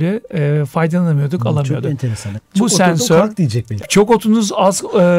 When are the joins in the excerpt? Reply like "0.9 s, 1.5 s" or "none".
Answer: 2.4 s, 3.8 s